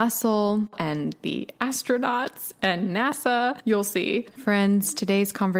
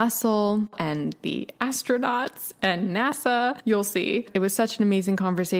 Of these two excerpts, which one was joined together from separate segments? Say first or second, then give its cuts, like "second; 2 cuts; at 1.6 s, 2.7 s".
first; 1 cut; at 4.3 s